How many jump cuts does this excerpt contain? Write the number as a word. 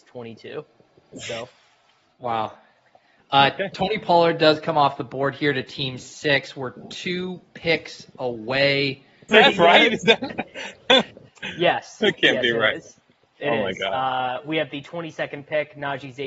one